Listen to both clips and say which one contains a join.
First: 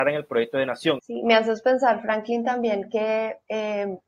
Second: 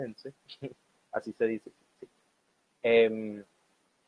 first; 1 cut; at 1.0 s

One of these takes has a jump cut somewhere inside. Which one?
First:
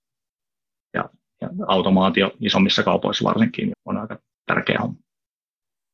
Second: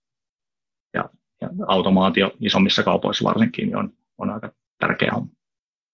first; 1 cut; at 3.7 s

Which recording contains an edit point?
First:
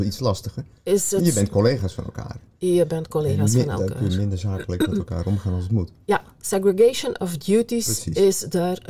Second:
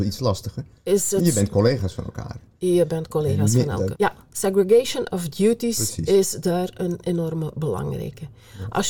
second; 1 cut; at 3.9 s

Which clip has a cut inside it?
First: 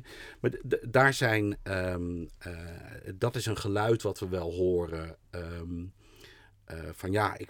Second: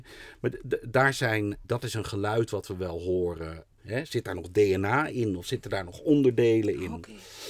second; 2 cuts; at 1.6 s, 3.8 s

